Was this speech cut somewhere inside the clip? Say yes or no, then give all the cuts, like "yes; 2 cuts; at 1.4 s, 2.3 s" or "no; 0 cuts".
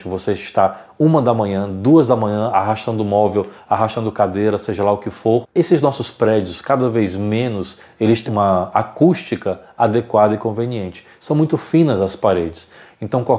yes; 1 cut; at 8.3 s